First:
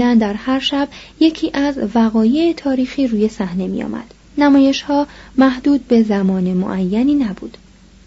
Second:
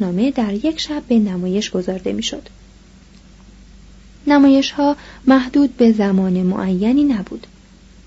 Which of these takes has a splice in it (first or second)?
first